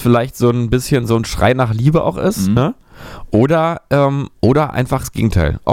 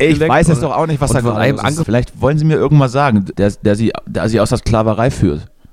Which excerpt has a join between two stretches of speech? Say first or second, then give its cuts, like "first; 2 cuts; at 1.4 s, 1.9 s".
second; 2 cuts; at 1.8 s, 3.3 s